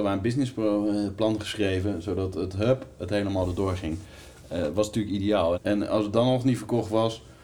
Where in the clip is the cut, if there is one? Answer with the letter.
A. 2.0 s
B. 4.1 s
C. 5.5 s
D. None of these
C